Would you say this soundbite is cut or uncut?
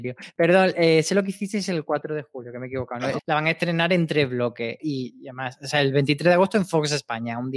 cut